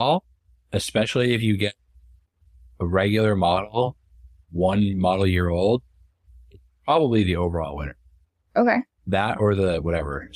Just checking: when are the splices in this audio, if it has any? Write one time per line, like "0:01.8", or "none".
none